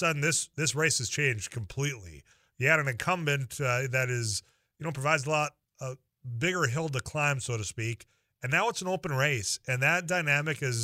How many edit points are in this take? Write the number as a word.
zero